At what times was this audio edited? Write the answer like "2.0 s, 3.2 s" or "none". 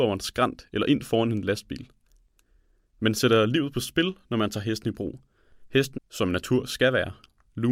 6.0 s